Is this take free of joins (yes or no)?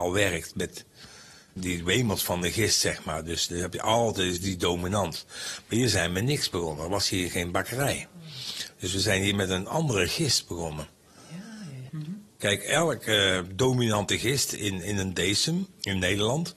no